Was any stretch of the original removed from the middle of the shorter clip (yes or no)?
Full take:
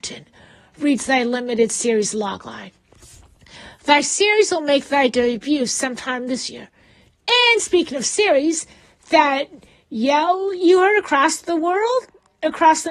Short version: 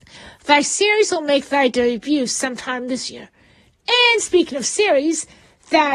no